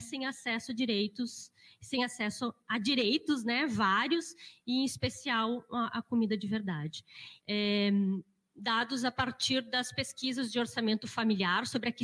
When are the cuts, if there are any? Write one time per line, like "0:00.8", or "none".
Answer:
0:07.4